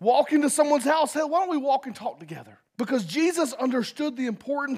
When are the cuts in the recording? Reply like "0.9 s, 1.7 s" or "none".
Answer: 2.7 s